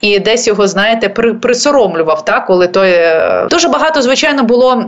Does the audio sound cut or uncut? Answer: cut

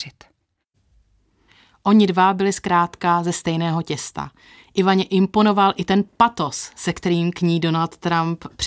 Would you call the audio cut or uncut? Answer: uncut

